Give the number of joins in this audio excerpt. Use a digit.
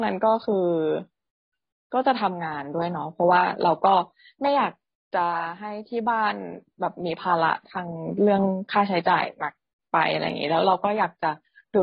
0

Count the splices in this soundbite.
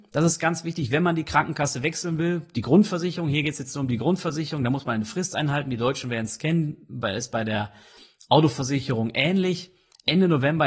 0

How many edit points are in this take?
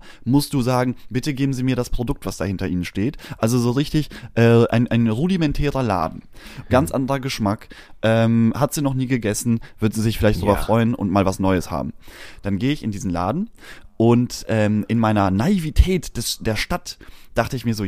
1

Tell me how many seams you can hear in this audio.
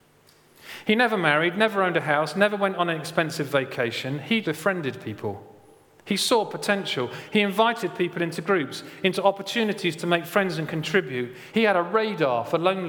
2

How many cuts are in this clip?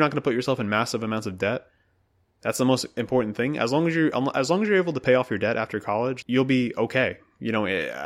1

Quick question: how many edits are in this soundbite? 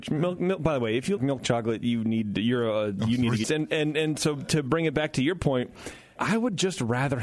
3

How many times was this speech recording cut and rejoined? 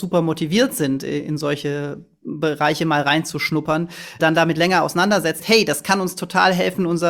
2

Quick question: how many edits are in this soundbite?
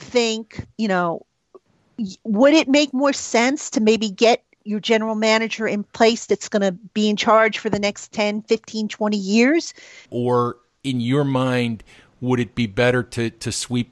1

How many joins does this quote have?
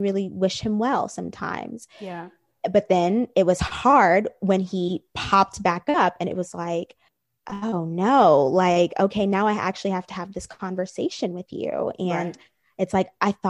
0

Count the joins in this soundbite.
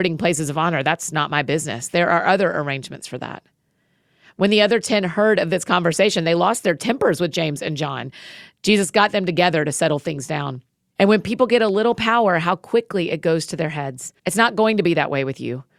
2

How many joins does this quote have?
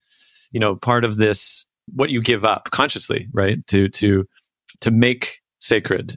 1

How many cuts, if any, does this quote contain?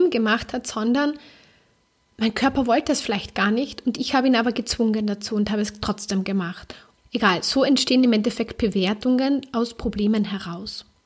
1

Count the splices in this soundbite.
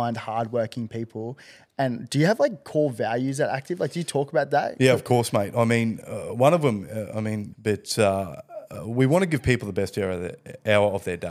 1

